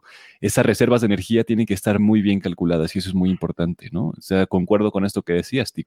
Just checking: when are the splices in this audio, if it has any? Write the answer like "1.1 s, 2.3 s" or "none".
2.0 s